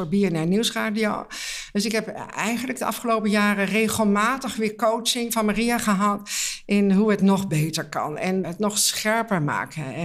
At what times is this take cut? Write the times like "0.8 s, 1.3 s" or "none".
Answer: 8.4 s